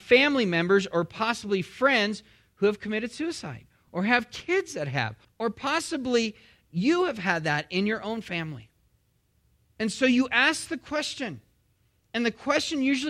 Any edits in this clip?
yes; 1 cut; at 5.2 s

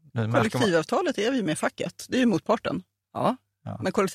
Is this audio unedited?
no; 1 cut; at 3.0 s

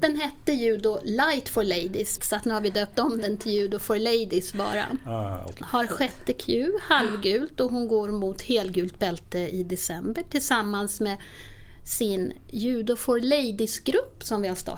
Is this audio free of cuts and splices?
no; 2 cuts; at 2.2 s, 5.6 s

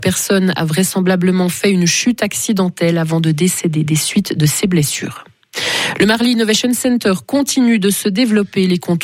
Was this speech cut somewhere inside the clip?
no; 0 cuts

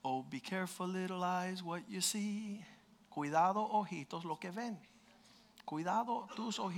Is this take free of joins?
yes; 0 cuts

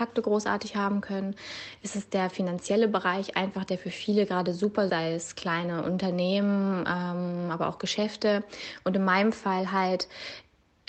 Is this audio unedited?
no; 1 cut; at 4.9 s

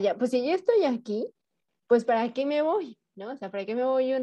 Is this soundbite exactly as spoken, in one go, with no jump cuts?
yes; 0 cuts

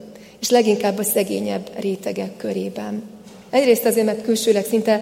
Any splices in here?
yes; 1 cut; at 3.5 s

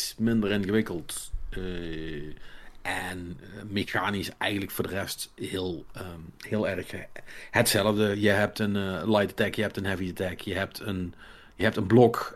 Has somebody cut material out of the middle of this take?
no; 0 cuts

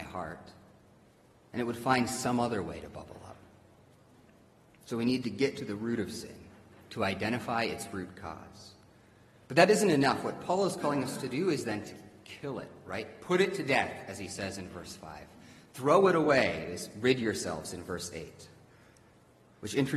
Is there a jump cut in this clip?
no; 0 cuts

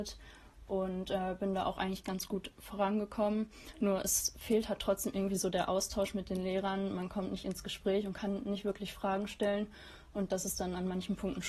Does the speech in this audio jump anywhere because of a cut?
no; 0 cuts

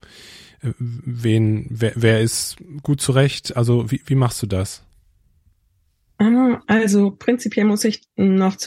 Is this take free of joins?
yes; 0 cuts

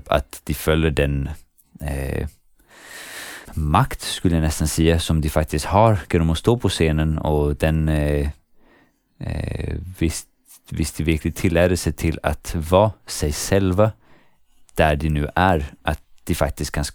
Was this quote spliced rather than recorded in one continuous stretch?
yes; 1 cut; at 3.4 s

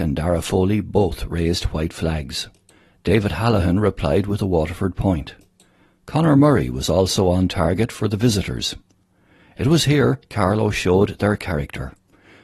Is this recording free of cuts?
yes; 0 cuts

